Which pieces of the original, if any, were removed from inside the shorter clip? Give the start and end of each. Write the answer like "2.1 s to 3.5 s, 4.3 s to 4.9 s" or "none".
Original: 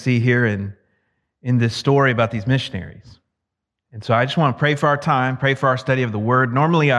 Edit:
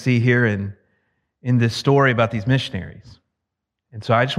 none